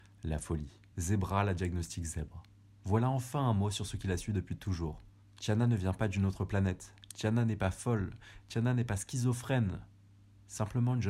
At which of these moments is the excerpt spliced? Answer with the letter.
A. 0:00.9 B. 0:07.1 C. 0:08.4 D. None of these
A